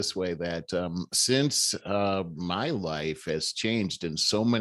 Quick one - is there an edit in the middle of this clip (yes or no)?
yes